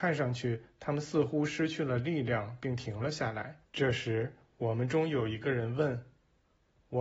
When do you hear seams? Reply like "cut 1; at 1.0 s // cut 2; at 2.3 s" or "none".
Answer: cut 1; at 3.6 s